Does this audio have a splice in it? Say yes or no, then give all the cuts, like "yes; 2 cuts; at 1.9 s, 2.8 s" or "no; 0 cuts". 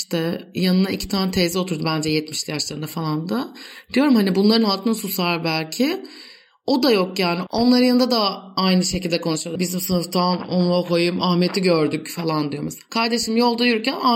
yes; 1 cut; at 9.6 s